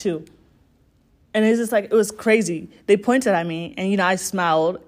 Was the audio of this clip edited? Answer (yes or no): no